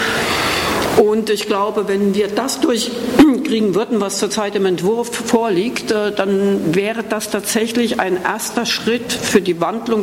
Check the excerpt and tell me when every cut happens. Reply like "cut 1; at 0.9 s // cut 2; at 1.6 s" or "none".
none